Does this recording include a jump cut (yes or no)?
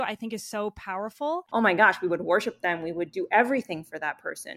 yes